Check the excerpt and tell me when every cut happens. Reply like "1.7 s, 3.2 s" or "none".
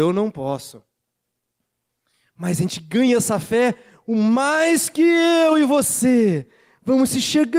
none